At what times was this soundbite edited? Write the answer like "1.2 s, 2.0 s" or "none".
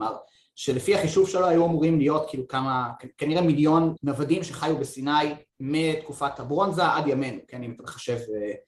4.0 s, 5.5 s